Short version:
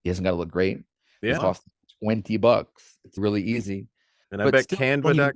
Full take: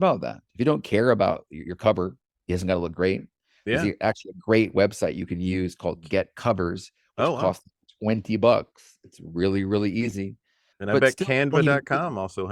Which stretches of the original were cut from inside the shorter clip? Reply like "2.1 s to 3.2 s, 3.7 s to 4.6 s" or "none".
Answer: 3.8 s to 7.4 s, 9.2 s to 9.7 s